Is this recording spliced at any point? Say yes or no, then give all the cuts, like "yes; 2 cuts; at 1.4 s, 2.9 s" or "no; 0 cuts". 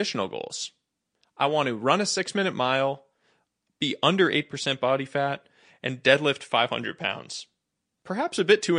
no; 0 cuts